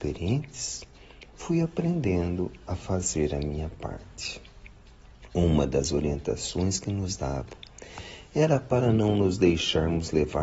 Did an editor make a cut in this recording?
no; 0 cuts

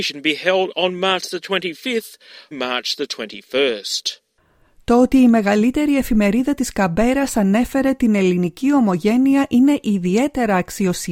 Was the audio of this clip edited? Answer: yes; 1 cut; at 2.5 s

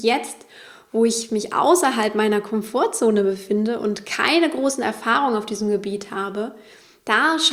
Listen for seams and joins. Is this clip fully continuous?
yes; 0 cuts

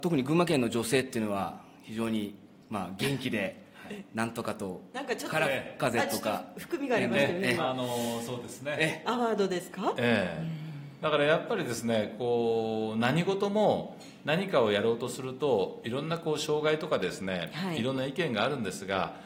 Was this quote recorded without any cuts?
no; 1 cut; at 9.0 s

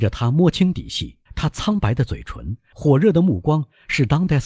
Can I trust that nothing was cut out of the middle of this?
no; 2 cuts; at 1.3 s, 2.7 s

